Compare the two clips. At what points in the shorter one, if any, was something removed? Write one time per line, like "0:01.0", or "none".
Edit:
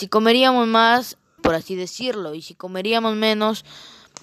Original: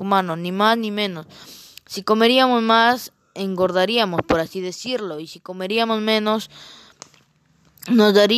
0:01.4